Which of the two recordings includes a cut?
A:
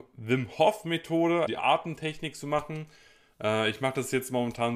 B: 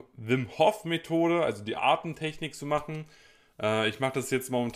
A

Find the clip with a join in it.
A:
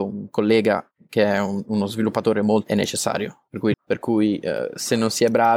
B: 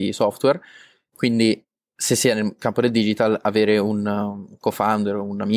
A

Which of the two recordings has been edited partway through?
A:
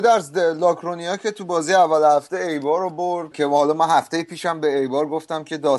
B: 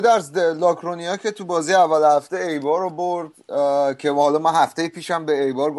A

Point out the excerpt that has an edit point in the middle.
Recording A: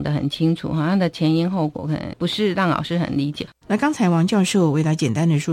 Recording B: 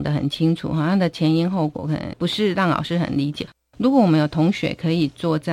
A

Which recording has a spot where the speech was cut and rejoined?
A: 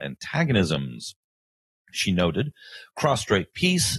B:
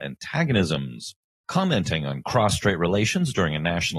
B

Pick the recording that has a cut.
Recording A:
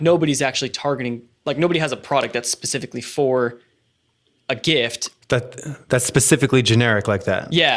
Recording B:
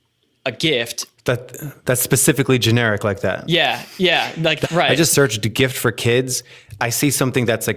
B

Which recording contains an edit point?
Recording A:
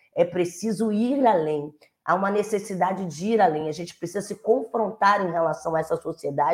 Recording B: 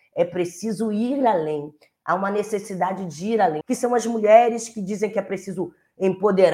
B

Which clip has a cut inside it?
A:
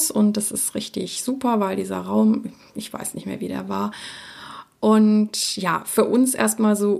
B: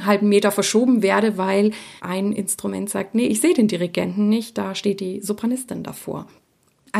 B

